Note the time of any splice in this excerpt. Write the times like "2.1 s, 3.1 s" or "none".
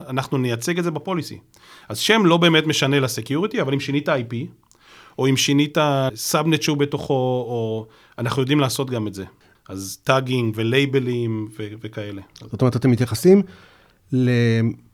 6.1 s, 9.5 s